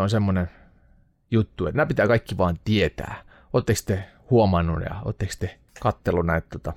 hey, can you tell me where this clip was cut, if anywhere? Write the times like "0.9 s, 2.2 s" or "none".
5.7 s